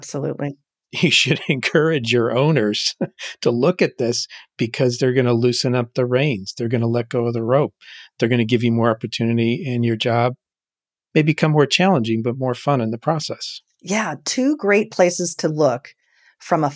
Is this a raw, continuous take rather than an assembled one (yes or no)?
yes